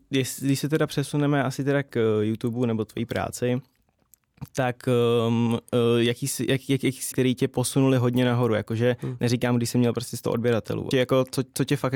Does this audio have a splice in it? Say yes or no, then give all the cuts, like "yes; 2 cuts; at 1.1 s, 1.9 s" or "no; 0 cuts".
yes; 2 cuts; at 7.1 s, 10.9 s